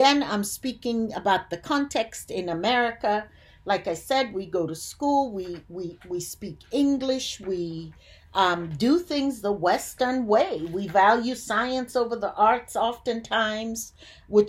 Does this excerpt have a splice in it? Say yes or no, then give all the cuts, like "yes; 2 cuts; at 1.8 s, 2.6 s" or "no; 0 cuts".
no; 0 cuts